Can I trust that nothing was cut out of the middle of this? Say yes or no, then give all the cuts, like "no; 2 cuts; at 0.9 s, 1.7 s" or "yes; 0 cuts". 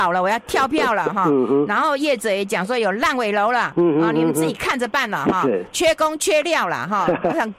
yes; 0 cuts